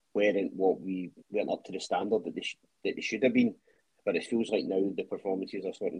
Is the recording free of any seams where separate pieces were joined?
no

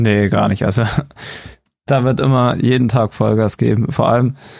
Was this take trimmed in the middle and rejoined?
no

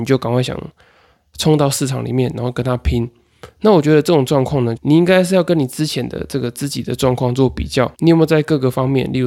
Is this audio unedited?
no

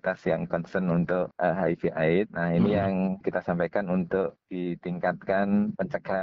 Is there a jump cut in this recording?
no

